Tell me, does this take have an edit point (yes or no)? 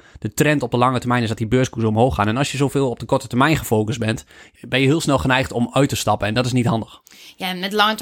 yes